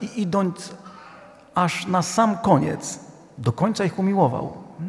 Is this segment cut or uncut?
uncut